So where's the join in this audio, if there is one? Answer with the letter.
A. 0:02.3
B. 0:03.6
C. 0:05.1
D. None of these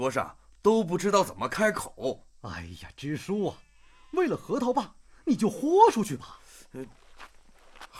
D